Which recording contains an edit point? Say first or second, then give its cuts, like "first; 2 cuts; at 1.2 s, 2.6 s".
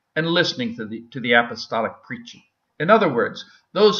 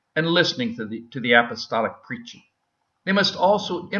first; 1 cut; at 2.6 s